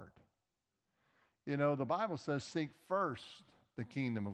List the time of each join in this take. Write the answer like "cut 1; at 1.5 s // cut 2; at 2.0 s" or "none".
none

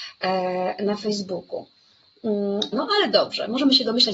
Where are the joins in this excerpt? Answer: cut 1; at 2.7 s

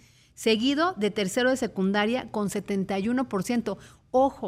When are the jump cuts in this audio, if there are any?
none

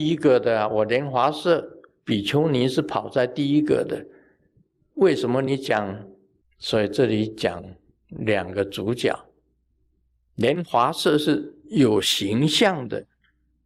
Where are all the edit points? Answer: cut 1; at 6.4 s // cut 2; at 10.3 s

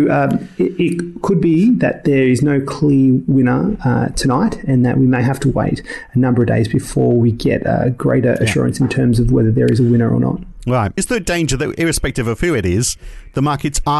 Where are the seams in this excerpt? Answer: cut 1; at 11.0 s

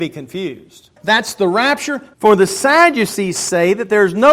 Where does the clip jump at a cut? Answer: cut 1; at 1.0 s // cut 2; at 2.1 s

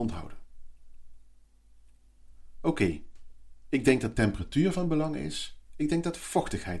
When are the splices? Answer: none

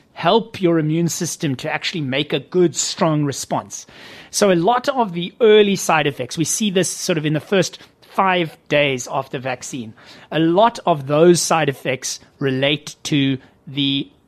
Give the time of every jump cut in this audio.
none

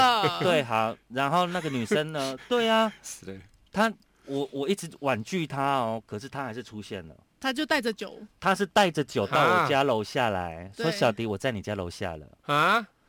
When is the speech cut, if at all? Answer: none

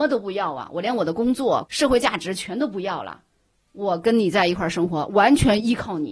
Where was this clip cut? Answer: cut 1; at 1.6 s

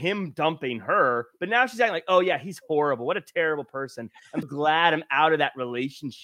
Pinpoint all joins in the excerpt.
cut 1; at 4.4 s

